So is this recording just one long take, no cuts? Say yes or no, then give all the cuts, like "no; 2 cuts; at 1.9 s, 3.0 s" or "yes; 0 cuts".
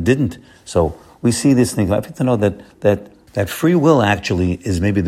no; 1 cut; at 3.3 s